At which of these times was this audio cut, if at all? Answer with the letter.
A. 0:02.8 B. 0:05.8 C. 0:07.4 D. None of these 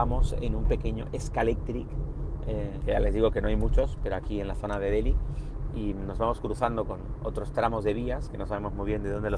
A